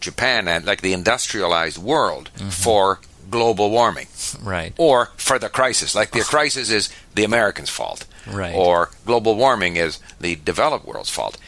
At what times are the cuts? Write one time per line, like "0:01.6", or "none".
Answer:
none